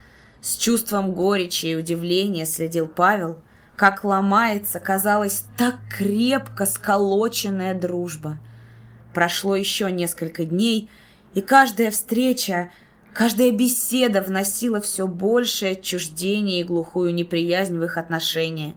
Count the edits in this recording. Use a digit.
0